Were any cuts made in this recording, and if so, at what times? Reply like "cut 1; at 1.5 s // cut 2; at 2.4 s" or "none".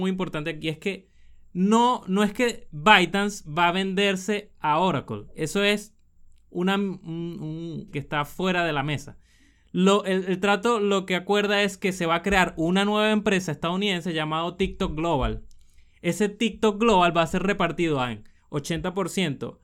cut 1; at 7.9 s